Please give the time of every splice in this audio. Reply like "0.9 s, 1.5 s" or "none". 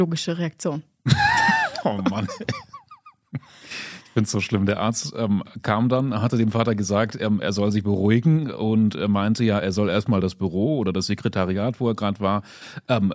none